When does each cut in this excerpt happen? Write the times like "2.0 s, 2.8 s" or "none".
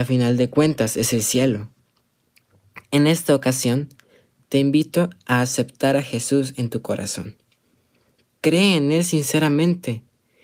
none